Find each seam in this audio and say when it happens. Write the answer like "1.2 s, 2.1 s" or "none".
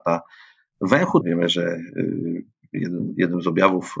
1.2 s